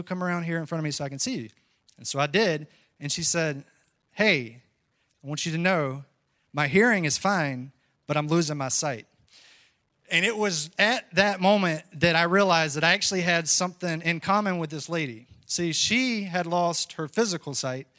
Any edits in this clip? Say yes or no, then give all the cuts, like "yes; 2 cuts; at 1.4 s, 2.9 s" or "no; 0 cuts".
no; 0 cuts